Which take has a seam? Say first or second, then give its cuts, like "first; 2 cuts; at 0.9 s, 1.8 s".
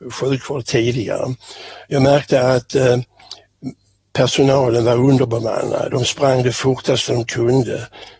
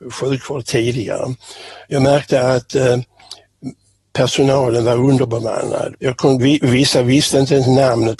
second; 1 cut; at 5.9 s